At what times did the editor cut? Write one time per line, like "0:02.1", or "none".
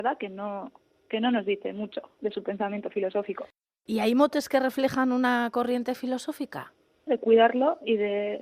0:07.1